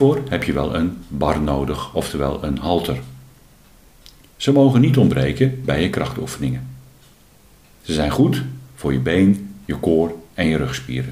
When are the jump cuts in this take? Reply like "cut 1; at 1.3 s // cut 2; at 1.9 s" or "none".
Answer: none